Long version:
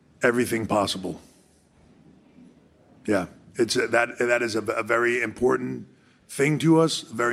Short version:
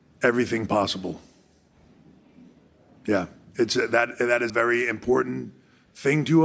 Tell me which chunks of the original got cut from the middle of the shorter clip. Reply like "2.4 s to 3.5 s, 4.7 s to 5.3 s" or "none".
4.5 s to 4.8 s